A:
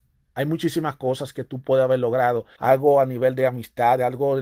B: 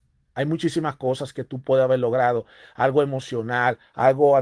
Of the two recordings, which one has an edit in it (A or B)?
A